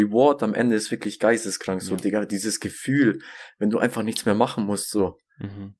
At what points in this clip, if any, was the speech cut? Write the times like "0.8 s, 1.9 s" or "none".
none